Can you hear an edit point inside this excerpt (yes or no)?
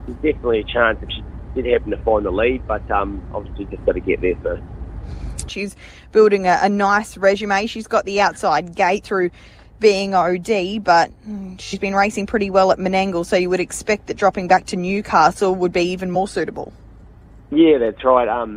yes